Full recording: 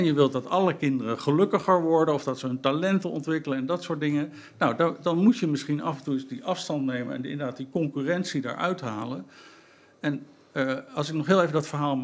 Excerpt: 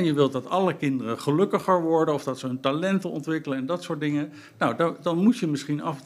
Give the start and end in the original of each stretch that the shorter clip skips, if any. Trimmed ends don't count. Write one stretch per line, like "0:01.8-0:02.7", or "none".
none

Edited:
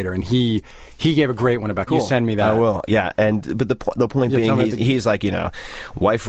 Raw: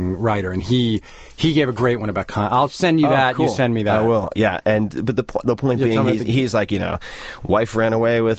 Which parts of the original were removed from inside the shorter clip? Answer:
0:02.3-0:03.3

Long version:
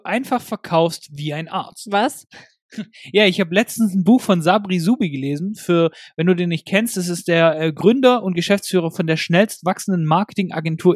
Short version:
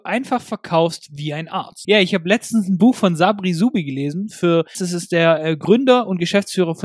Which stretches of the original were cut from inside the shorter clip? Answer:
0:01.8-0:03.1
0:06.0-0:06.9

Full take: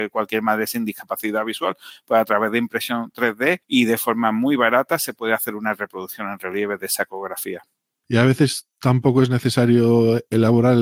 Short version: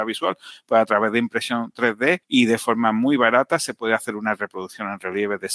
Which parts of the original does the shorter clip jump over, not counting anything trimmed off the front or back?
none

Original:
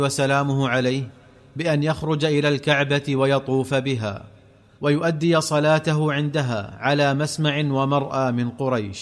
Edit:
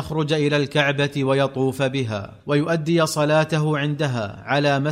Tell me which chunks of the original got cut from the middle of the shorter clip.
0:04.3-0:04.7

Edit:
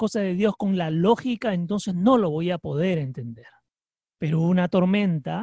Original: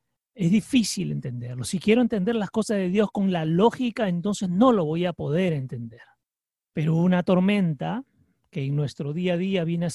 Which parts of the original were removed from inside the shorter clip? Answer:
none

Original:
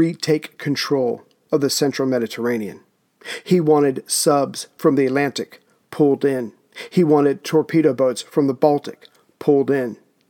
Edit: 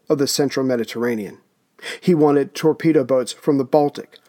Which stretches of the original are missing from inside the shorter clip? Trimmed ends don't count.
0:03.4-0:06.9

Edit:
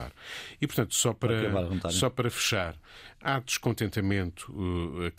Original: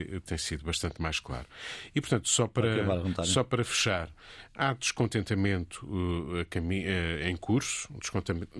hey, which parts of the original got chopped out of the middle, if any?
none

